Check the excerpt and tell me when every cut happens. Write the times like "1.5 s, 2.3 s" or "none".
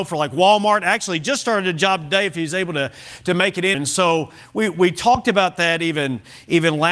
3.7 s

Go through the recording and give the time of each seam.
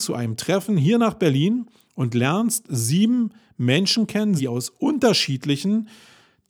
4.4 s

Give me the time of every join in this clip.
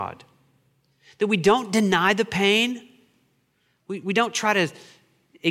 none

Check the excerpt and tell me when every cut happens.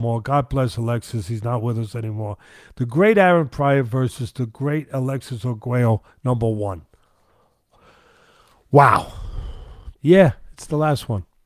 10.0 s

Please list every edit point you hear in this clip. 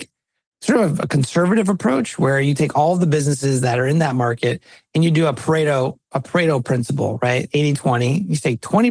none

